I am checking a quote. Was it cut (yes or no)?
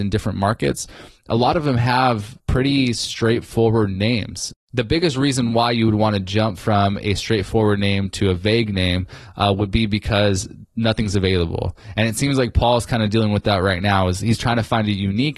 yes